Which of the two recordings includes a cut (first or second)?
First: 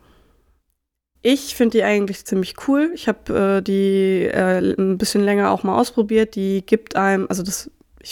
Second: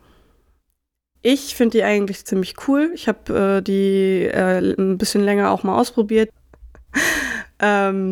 second